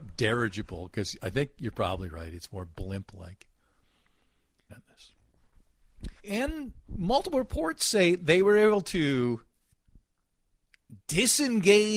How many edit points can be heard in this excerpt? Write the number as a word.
two